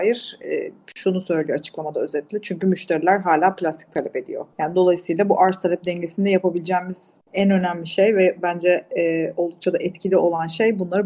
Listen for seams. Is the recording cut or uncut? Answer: cut